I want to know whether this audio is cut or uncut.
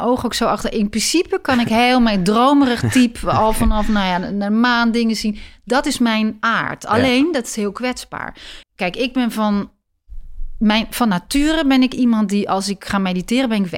cut